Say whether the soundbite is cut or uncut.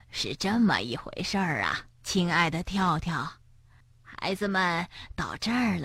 cut